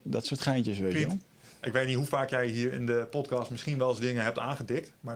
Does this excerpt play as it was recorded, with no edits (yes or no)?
yes